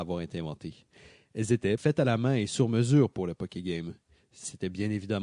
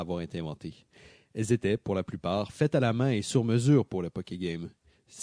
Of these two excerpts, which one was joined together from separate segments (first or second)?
first